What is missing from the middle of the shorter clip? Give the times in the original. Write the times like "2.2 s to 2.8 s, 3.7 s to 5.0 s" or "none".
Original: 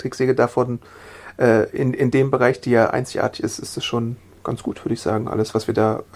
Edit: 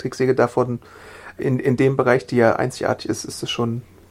1.4 s to 1.7 s